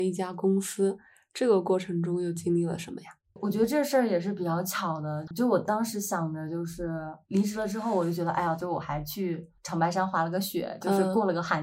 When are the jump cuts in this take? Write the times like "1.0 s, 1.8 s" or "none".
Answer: 7.2 s, 8.6 s